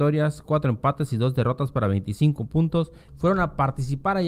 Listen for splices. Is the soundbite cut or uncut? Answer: cut